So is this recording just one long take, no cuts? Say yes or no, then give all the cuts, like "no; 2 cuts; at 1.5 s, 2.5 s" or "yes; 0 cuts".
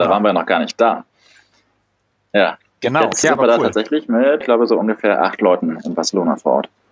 no; 2 cuts; at 3.2 s, 4.4 s